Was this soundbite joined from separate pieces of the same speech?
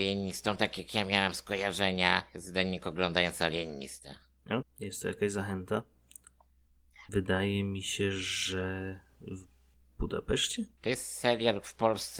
yes; 3 cuts; at 4.6 s, 7.1 s, 10.8 s

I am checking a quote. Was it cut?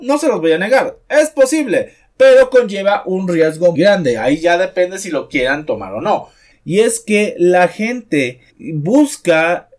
yes; 3 cuts; at 3.7 s, 6.5 s, 8.5 s

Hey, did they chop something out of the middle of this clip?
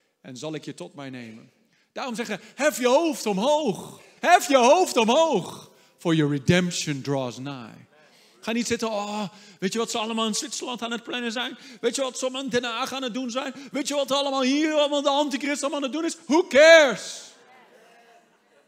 yes; 1 cut; at 4.2 s

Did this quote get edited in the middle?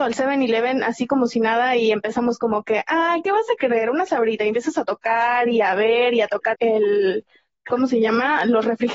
yes; 1 cut; at 6.5 s

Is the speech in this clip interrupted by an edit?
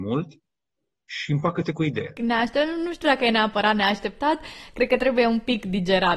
yes; 1 cut; at 2.2 s

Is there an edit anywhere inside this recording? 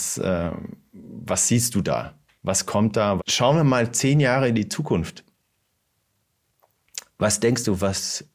yes; 1 cut; at 3.2 s

